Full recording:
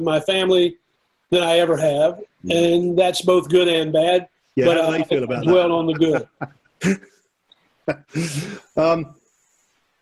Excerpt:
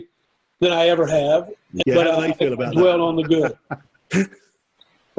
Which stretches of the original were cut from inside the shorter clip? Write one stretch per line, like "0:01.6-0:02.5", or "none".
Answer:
0:02.5-0:04.5

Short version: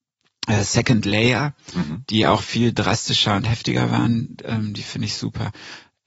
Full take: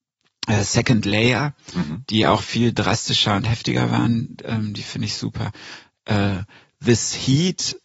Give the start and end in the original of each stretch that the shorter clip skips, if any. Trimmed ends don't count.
none

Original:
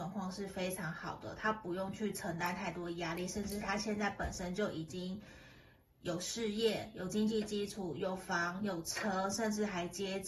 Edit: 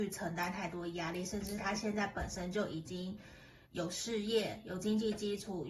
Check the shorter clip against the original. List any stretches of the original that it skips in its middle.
0:05.7-0:05.9

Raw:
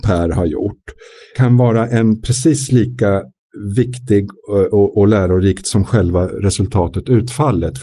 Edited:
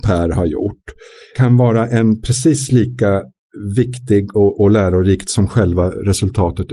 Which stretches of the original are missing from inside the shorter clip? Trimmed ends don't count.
0:04.3-0:04.7

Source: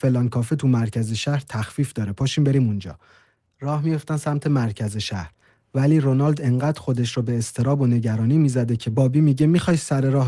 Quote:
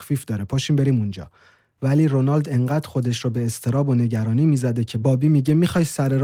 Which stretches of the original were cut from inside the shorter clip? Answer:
0:03.5-0:05.7

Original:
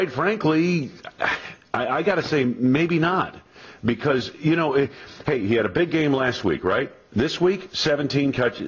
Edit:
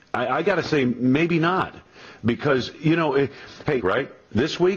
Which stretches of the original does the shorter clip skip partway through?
0:05.4-0:06.6

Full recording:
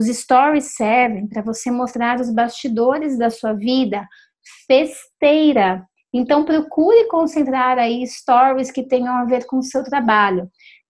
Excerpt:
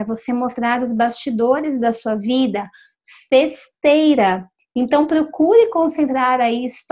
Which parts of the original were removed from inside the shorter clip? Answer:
none

